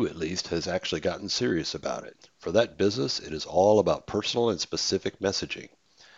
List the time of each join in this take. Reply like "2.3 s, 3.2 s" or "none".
2.2 s